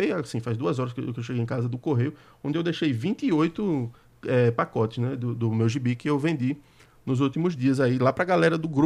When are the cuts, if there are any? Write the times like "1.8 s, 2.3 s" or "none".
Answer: 5.4 s